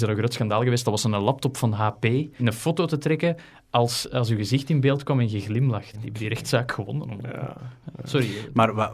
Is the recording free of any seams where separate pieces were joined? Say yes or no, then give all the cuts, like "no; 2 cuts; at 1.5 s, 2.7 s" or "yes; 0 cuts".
no; 2 cuts; at 2.4 s, 5.9 s